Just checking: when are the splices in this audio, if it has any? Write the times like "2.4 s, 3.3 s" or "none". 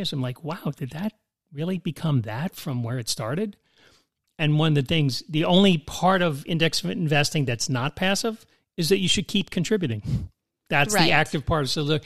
none